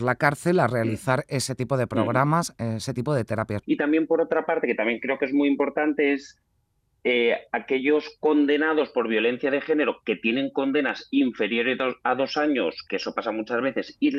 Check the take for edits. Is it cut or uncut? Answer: cut